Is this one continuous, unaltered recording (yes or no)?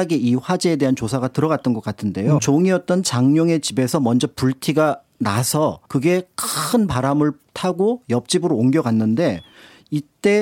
no